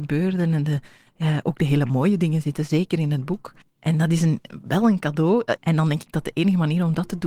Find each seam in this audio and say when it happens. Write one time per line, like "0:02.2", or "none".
0:03.6
0:05.6